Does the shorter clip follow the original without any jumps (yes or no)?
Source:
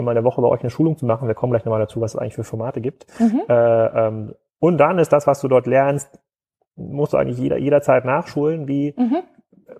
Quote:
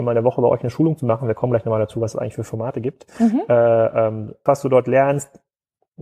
no